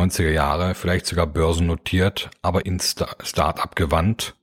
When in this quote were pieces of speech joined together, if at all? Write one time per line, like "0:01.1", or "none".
0:02.6